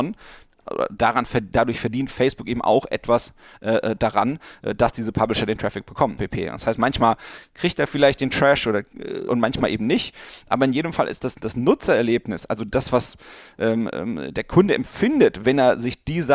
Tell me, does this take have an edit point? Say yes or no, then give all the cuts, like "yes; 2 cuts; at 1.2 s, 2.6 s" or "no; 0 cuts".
yes; 2 cuts; at 6.2 s, 9.3 s